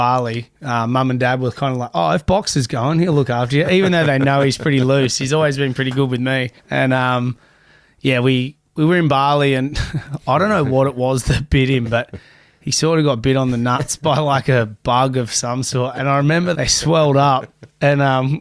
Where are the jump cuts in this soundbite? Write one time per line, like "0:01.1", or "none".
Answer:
0:06.6
0:16.5